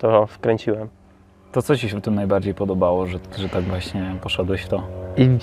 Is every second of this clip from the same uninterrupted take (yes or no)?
yes